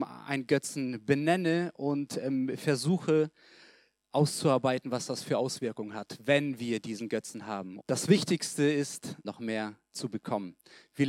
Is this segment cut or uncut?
cut